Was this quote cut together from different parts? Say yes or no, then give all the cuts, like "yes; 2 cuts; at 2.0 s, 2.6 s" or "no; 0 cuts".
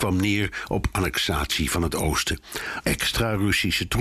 yes; 1 cut; at 2.8 s